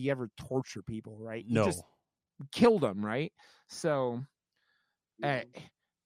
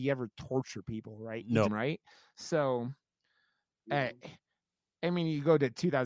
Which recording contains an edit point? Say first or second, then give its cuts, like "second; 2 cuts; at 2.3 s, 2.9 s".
second; 1 cut; at 1.6 s